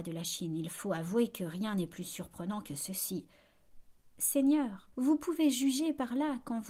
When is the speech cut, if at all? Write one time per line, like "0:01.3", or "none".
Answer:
0:04.9